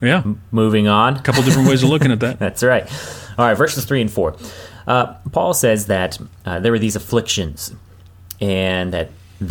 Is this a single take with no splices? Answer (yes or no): yes